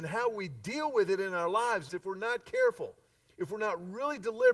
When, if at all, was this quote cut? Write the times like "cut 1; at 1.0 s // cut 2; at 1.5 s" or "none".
cut 1; at 1.9 s